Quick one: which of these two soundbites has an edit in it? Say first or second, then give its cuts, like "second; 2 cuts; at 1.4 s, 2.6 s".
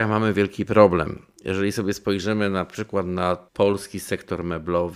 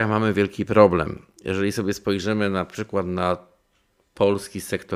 first; 1 cut; at 3.5 s